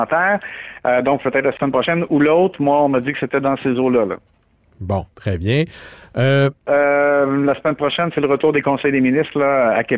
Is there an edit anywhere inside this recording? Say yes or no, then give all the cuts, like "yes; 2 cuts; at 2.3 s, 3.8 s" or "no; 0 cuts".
yes; 1 cut; at 6.7 s